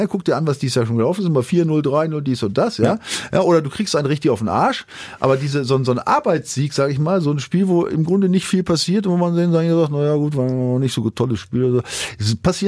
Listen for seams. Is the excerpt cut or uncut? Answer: uncut